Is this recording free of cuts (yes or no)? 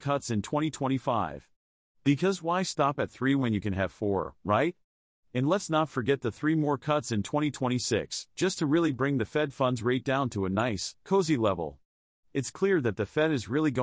yes